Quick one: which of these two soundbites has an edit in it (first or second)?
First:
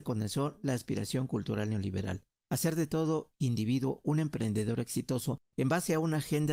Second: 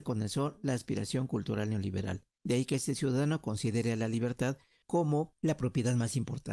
second